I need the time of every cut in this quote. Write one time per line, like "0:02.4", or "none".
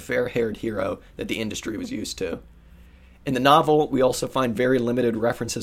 none